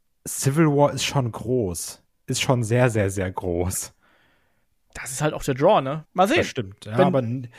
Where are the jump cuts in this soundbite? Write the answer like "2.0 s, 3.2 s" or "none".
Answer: 6.0 s